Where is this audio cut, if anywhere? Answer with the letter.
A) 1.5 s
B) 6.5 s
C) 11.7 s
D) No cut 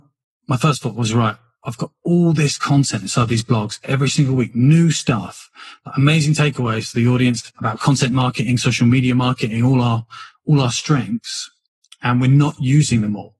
D